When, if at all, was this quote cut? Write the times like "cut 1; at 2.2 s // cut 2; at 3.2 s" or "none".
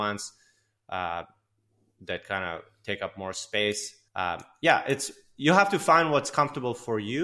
cut 1; at 4.1 s